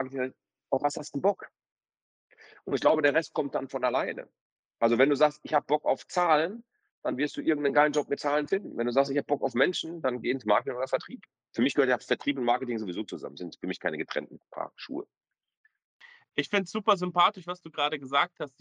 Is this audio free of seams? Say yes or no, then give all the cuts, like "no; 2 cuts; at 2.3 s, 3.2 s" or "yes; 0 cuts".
yes; 0 cuts